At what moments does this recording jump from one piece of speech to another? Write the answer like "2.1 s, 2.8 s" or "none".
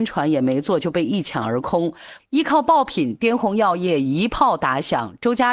2.2 s

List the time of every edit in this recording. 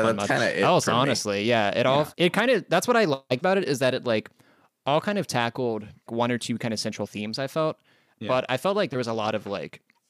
2.1 s, 6.1 s

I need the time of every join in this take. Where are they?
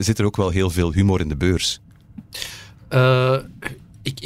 none

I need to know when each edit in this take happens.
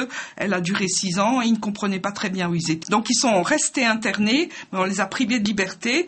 2.8 s

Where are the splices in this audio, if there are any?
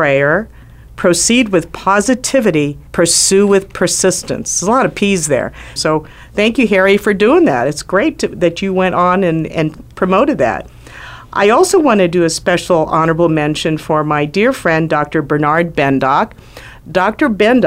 2.9 s, 5.8 s

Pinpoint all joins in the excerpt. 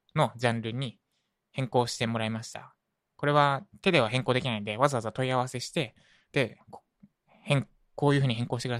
none

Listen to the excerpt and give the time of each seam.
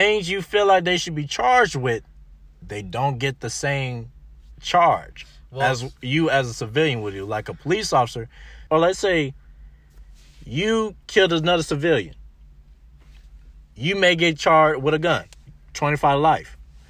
8.7 s

